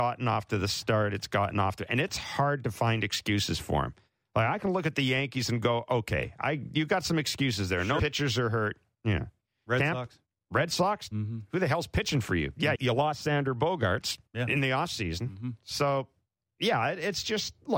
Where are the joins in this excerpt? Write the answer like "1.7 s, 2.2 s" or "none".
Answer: 8.0 s, 12.7 s, 14.3 s